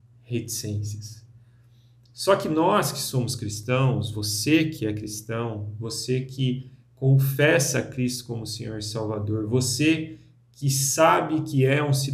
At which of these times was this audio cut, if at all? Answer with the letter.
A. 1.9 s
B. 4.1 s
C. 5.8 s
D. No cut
D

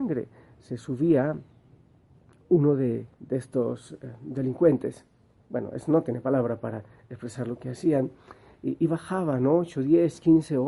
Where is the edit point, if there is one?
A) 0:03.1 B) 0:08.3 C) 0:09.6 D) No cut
A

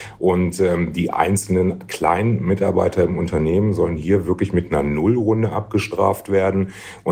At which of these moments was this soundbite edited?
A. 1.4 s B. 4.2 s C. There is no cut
C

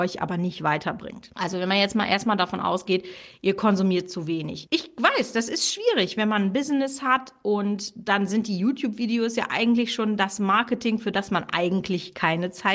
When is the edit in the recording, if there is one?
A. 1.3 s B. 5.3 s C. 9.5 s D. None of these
D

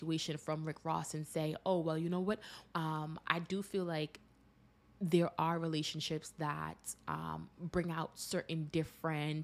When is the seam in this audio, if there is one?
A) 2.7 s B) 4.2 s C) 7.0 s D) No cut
A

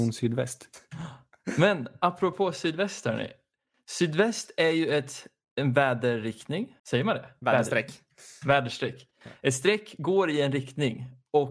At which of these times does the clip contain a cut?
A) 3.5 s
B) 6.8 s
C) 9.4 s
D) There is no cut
B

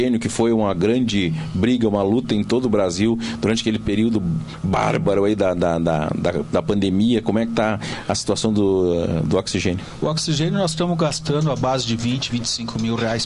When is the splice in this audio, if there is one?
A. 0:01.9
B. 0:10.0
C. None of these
C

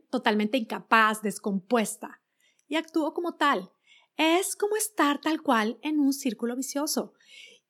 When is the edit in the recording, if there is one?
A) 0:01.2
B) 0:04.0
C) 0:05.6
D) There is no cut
D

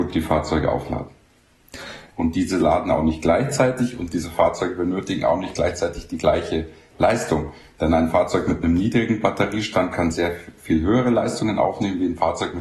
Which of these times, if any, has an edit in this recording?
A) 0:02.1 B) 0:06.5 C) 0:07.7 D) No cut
A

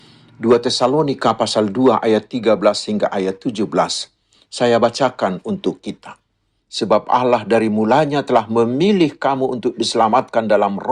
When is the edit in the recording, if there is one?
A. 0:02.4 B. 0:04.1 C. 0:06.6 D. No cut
C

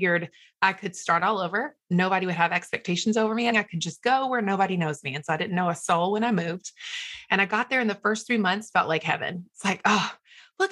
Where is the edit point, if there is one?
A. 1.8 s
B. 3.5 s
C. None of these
B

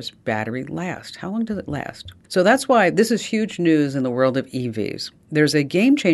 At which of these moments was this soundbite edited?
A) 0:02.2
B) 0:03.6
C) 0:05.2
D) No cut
A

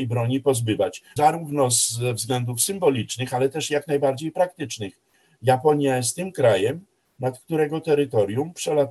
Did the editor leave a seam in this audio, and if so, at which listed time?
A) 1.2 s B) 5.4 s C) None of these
A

